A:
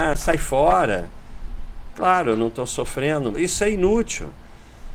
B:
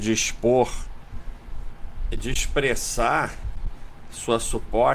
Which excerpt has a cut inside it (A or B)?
A